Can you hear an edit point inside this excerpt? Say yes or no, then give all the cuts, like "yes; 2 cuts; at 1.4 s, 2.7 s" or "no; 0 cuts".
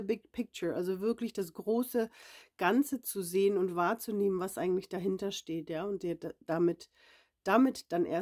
no; 0 cuts